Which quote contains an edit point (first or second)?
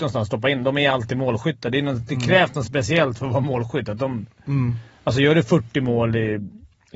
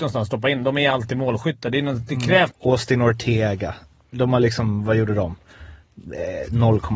second